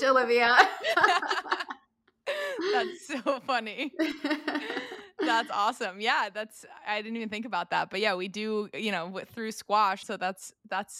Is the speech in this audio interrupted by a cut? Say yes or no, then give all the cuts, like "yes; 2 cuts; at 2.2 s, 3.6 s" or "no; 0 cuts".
yes; 1 cut; at 10.0 s